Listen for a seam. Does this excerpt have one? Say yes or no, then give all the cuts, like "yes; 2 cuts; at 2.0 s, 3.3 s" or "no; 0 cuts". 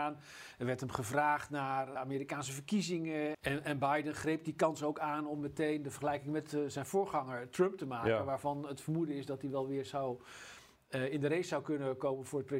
yes; 2 cuts; at 2.0 s, 3.3 s